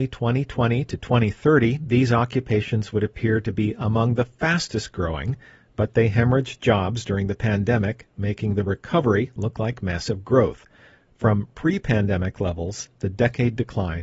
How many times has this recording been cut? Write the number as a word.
zero